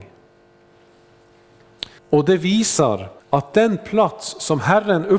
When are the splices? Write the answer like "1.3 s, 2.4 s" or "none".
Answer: 2.0 s, 3.2 s